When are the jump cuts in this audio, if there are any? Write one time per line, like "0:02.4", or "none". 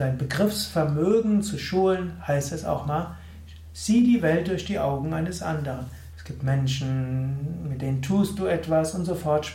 0:06.1